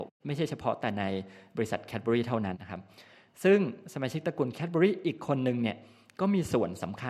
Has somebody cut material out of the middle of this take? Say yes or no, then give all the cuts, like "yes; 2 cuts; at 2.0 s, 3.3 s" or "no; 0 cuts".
yes; 1 cut; at 2.5 s